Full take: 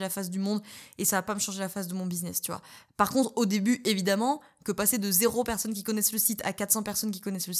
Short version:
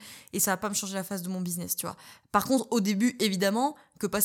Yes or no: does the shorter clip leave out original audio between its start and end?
no